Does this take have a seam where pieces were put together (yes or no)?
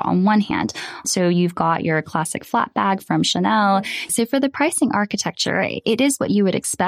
yes